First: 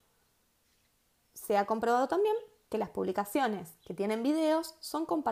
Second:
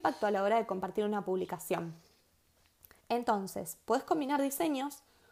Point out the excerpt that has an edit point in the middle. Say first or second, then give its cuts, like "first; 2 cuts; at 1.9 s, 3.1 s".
second; 1 cut; at 3.0 s